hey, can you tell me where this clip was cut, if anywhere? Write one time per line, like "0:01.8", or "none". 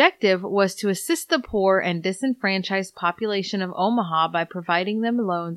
none